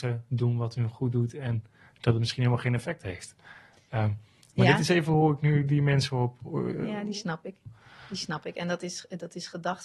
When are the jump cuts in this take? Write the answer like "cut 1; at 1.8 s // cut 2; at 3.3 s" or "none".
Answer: none